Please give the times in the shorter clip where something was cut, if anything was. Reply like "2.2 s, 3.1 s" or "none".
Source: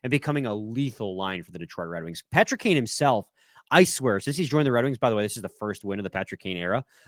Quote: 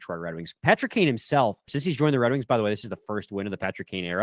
1.7 s